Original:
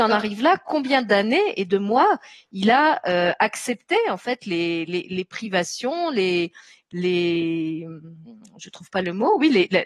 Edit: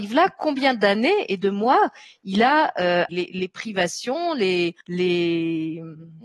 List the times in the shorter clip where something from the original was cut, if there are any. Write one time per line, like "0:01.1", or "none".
0:03.1
0:04.8